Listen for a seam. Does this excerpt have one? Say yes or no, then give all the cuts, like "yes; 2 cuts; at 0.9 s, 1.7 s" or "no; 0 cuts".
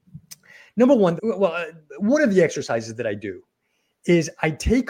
yes; 1 cut; at 1.2 s